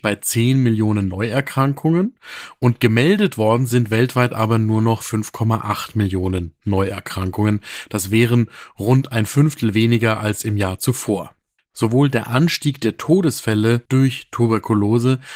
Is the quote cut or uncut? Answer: cut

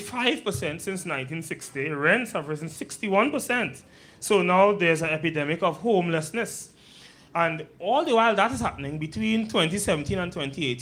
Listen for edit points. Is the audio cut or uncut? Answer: uncut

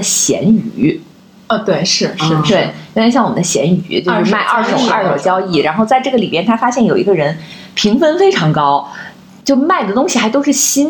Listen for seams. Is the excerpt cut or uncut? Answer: uncut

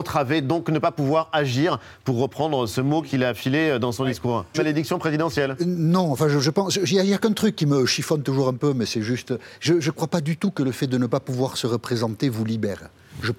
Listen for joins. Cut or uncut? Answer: cut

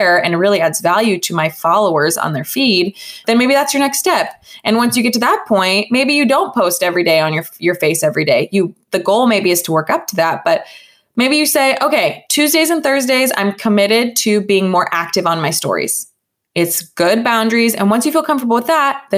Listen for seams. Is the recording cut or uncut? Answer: uncut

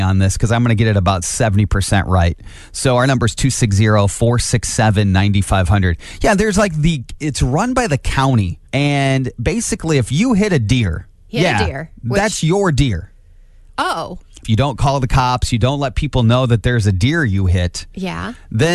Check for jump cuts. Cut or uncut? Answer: cut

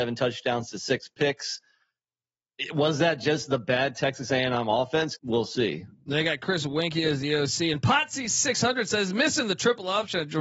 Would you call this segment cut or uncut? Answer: cut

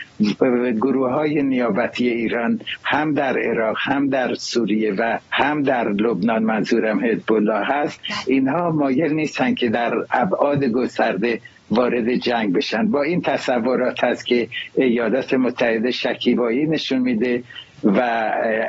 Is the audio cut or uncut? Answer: cut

